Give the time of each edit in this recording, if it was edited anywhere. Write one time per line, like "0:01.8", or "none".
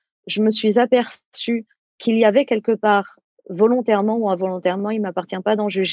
none